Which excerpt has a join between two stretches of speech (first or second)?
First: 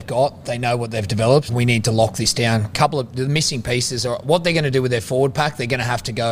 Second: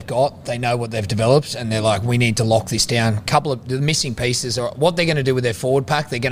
first